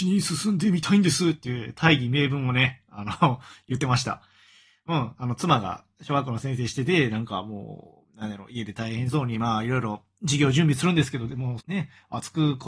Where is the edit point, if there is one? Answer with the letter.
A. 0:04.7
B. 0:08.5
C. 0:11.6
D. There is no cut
C